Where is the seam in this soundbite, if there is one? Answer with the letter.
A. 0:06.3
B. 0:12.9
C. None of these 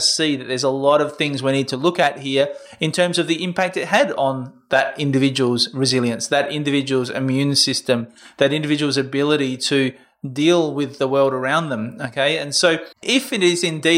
B